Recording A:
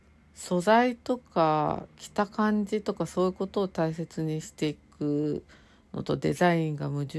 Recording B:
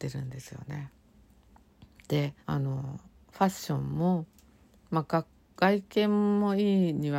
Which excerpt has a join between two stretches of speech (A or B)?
B